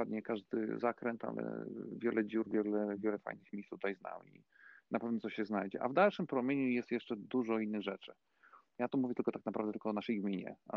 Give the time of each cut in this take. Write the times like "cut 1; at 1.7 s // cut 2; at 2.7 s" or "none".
cut 1; at 2.5 s